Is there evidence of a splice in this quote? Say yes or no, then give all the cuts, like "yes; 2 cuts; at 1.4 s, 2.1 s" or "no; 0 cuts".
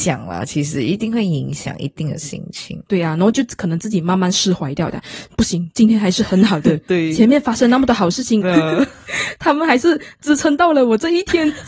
yes; 1 cut; at 8.4 s